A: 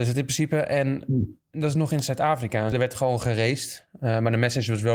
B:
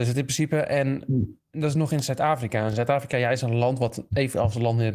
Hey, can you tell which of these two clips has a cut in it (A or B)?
A